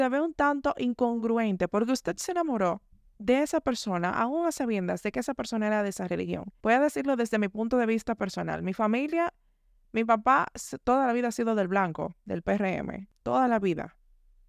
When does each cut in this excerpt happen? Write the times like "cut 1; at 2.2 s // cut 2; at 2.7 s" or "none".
cut 1; at 6.6 s